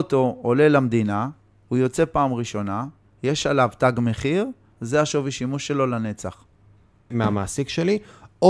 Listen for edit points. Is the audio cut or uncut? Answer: cut